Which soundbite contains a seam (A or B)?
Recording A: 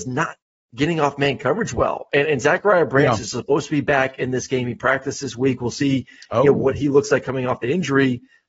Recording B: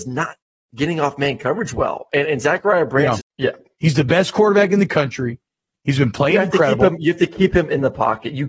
B